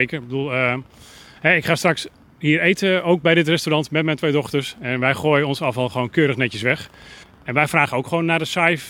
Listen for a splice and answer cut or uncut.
cut